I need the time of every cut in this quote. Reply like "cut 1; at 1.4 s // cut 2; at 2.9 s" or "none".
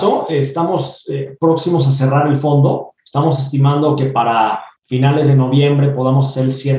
cut 1; at 3.0 s // cut 2; at 4.8 s